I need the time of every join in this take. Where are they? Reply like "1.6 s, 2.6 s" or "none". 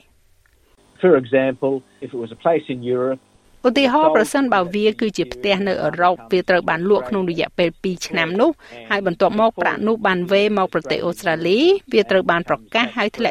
none

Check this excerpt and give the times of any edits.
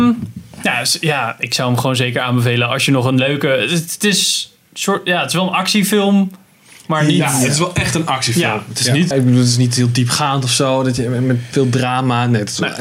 9.1 s

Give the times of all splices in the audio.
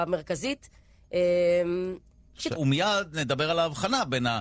2.6 s

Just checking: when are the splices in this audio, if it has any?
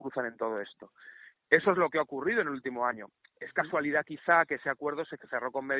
1.4 s

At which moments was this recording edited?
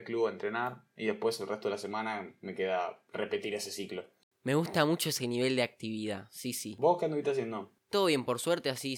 7.8 s

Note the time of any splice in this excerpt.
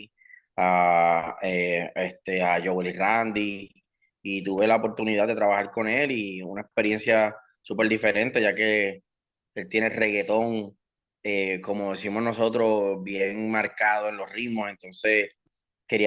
none

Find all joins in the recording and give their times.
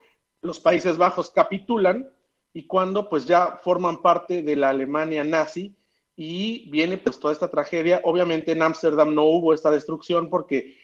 none

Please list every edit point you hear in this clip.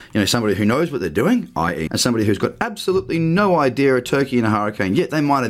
1.9 s

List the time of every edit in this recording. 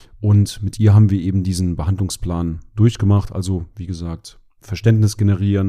none

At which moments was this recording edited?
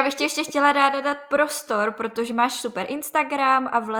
none

